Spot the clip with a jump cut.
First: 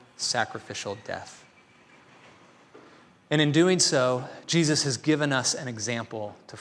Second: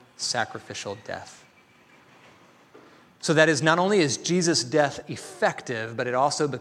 second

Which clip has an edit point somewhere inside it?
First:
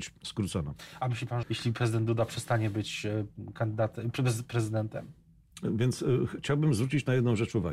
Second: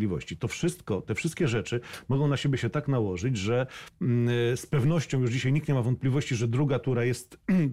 first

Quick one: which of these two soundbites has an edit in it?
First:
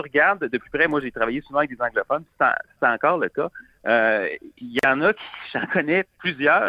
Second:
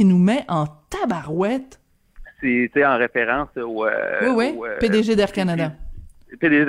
second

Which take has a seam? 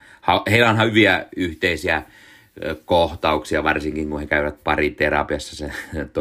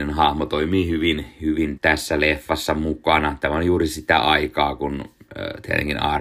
second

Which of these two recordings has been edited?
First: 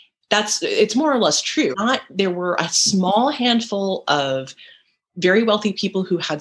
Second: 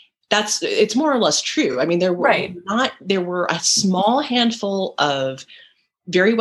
first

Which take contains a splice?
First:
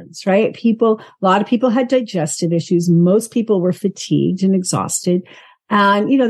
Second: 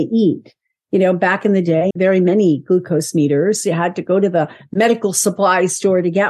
second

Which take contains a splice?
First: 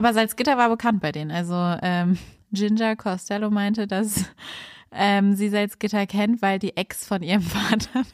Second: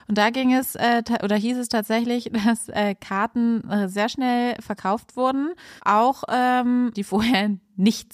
second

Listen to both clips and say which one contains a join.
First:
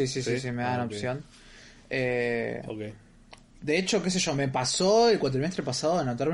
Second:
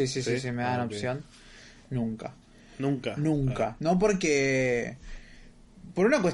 second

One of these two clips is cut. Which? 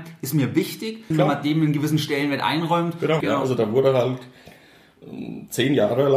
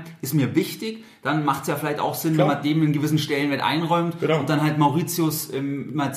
first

